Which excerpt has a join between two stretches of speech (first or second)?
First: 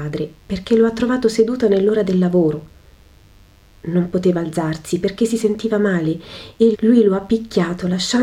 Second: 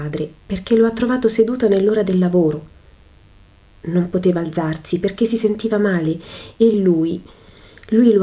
first